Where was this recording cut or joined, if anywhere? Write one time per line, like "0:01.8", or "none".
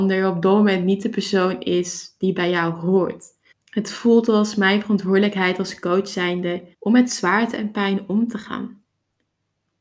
0:03.5
0:06.7